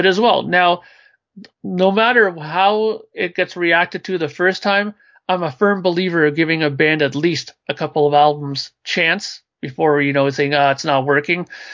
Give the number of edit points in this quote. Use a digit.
1